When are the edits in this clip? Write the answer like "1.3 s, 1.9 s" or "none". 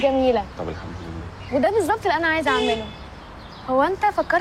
none